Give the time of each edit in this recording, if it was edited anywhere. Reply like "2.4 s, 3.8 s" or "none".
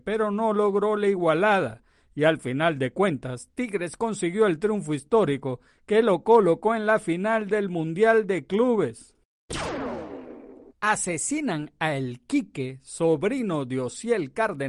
10.7 s